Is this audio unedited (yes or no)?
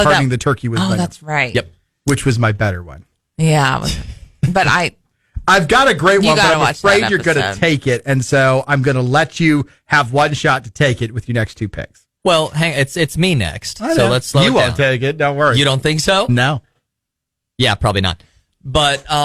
yes